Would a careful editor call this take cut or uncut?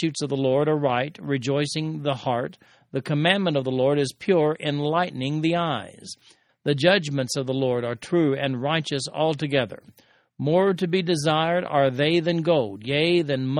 cut